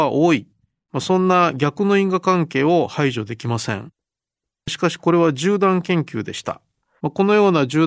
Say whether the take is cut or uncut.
cut